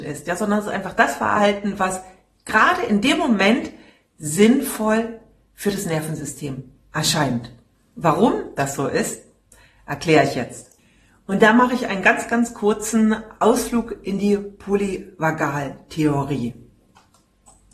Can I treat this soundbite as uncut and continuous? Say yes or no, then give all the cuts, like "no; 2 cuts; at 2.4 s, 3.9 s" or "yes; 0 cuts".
yes; 0 cuts